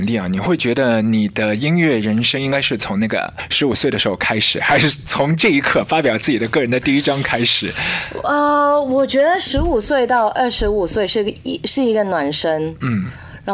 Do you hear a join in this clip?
no; 0 cuts

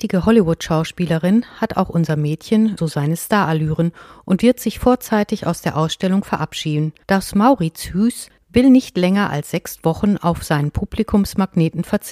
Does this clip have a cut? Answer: yes; 2 cuts; at 2.8 s, 7.0 s

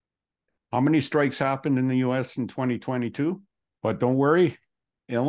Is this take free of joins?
no; 1 cut; at 3.8 s

